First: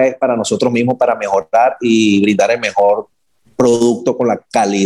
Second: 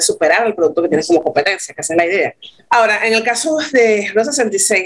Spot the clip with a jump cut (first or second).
second